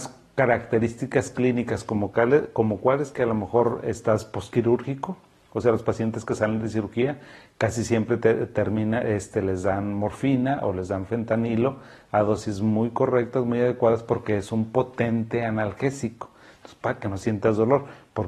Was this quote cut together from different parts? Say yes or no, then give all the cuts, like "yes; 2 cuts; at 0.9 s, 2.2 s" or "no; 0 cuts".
no; 0 cuts